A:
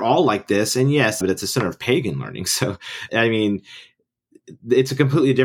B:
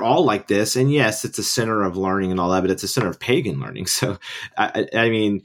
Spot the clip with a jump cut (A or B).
A